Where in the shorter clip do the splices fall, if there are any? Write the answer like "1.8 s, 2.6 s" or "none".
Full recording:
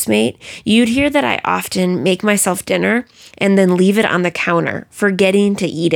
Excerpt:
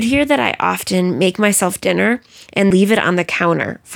2.7 s